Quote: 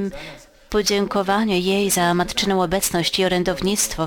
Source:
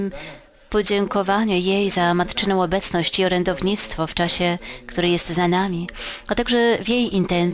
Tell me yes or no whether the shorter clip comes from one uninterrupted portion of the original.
yes